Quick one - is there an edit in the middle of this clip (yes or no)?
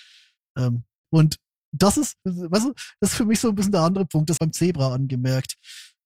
yes